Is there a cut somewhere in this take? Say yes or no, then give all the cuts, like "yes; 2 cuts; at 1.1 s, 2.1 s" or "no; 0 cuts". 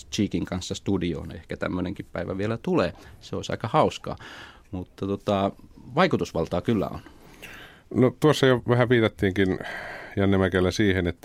no; 0 cuts